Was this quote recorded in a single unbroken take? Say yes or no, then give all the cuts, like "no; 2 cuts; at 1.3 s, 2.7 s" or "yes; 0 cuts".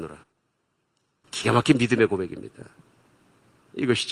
no; 1 cut; at 1.2 s